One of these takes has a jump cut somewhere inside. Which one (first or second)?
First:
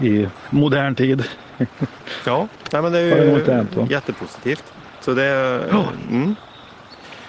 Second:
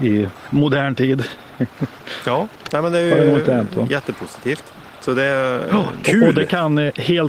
second